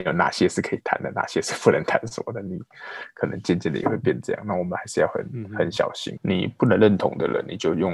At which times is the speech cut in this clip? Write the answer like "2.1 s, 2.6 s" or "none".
6.2 s

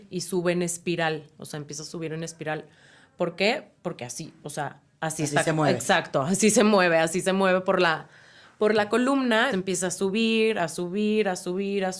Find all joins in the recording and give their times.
9.5 s

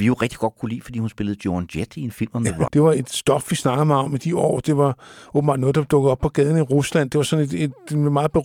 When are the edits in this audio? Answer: 2.7 s

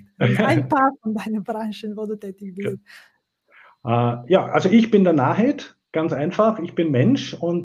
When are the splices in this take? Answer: none

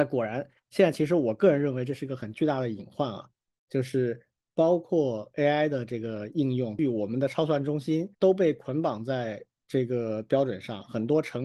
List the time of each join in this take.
6.8 s, 8.1 s

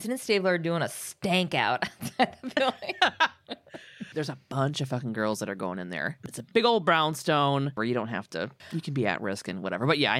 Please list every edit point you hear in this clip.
7.8 s

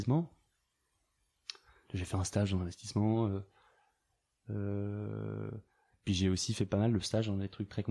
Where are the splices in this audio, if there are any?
none

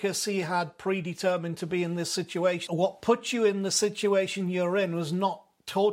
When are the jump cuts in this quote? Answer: 2.7 s

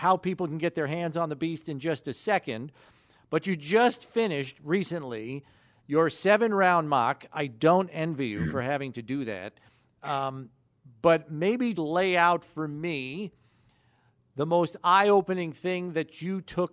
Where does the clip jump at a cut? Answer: 11.7 s

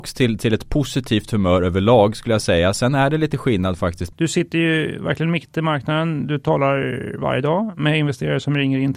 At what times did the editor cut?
4.1 s

